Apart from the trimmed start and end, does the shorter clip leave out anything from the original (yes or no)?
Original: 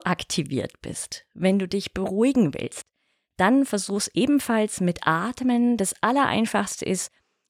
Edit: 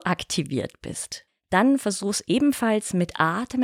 yes